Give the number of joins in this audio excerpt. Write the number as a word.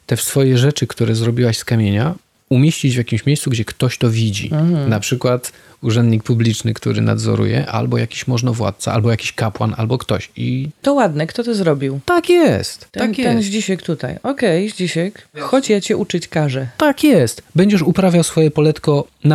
zero